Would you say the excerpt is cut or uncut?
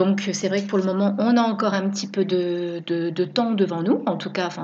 uncut